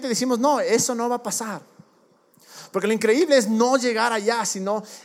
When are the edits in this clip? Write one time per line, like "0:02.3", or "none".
none